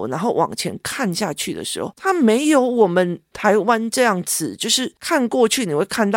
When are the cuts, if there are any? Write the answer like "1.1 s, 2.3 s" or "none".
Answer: 1.9 s